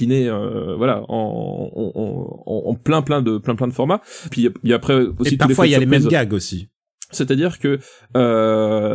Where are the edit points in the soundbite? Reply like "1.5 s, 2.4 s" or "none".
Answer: 4.3 s, 7.1 s